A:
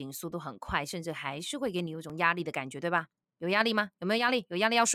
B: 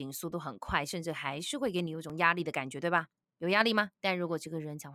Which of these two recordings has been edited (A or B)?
B